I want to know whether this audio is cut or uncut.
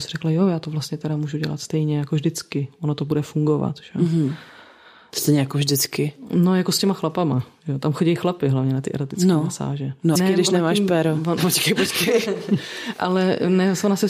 cut